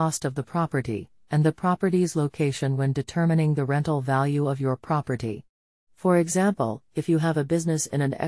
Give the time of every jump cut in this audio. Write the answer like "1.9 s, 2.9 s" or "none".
1.2 s